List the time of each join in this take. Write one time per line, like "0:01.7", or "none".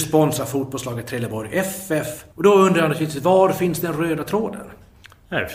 0:02.3